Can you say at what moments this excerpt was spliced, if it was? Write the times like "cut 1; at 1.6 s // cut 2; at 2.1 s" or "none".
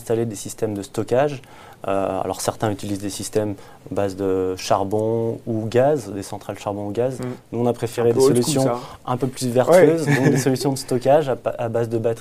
none